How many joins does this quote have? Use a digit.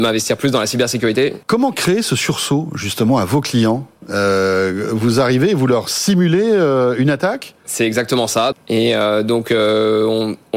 2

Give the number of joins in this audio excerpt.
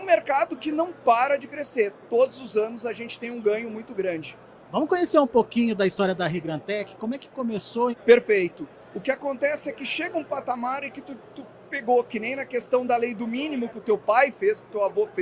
2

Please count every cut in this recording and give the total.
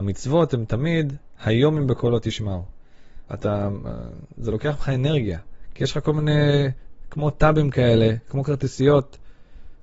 1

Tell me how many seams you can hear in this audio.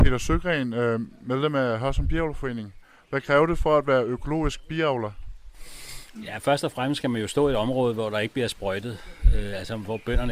0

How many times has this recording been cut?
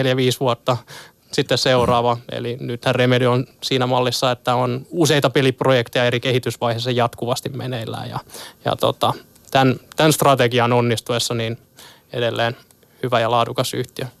0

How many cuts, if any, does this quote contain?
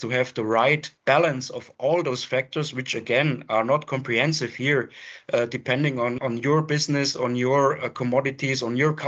2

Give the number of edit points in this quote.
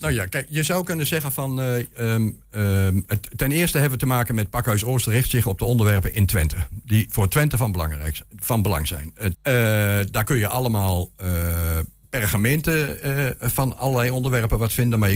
1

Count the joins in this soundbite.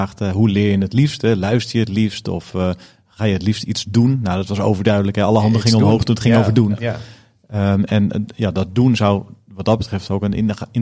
0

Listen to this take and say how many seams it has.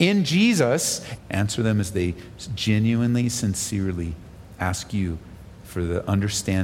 1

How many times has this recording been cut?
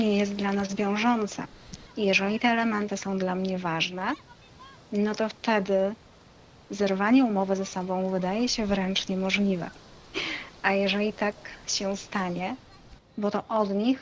2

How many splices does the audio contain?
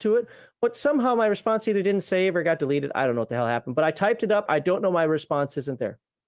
1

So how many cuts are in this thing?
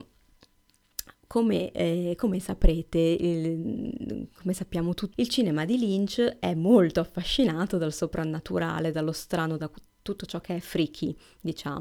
2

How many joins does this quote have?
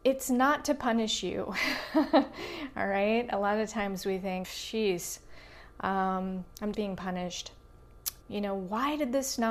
3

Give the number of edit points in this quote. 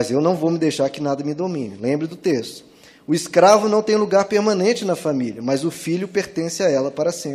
0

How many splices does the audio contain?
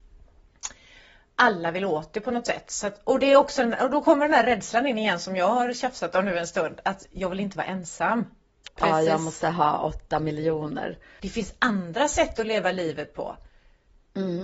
2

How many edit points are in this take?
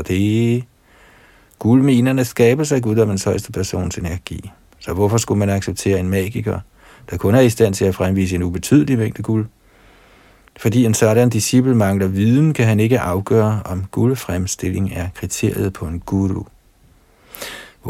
1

